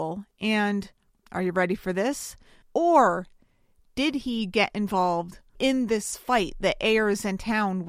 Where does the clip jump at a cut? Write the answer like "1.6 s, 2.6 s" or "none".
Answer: 2.6 s, 5.6 s